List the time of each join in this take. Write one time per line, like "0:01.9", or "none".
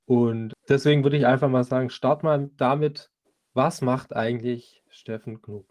none